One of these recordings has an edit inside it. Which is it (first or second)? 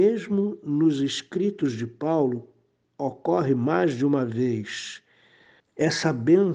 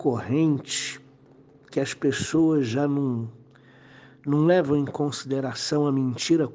first